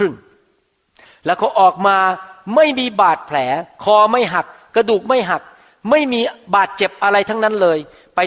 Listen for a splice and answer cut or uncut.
uncut